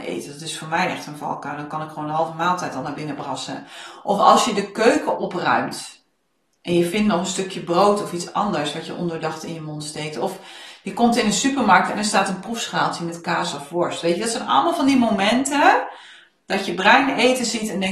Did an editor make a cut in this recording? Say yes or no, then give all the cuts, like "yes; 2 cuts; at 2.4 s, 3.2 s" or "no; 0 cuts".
no; 0 cuts